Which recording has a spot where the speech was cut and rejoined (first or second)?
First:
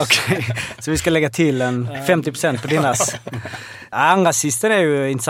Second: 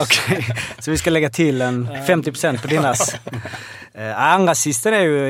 first